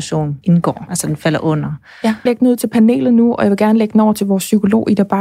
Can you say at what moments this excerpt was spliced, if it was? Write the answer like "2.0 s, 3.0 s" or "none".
2.3 s